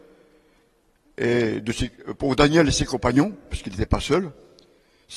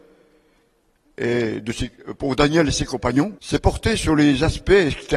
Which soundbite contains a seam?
second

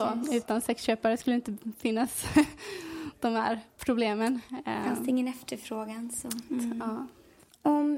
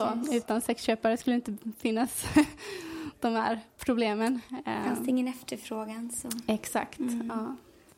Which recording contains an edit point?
first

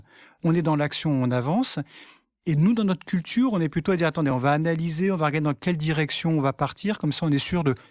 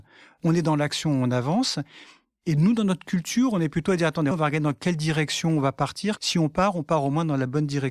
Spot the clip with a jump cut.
second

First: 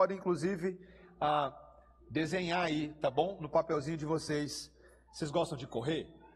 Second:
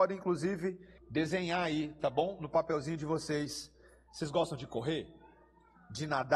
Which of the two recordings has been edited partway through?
second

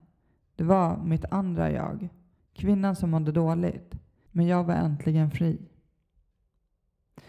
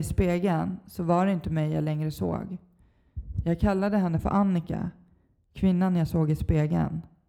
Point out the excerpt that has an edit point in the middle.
first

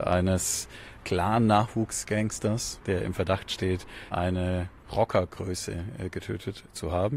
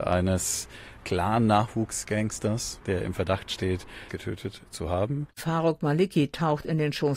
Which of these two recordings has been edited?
second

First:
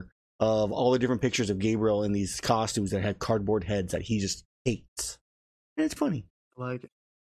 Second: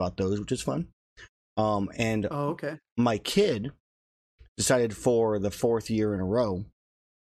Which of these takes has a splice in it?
first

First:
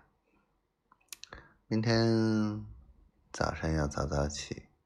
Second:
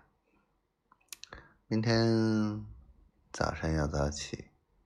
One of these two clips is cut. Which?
second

